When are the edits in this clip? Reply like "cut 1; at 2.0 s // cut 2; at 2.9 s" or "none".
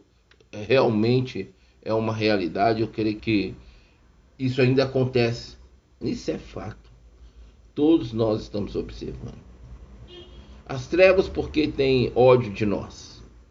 cut 1; at 3.2 s // cut 2; at 6.0 s